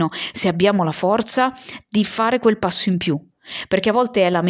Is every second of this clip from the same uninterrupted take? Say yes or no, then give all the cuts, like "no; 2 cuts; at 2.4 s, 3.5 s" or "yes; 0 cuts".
yes; 0 cuts